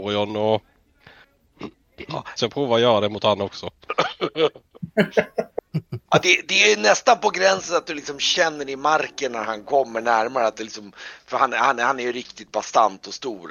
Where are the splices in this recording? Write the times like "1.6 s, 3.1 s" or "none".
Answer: 2.4 s